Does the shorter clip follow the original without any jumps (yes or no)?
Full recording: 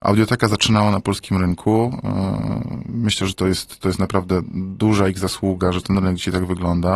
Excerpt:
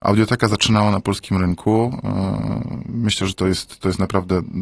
yes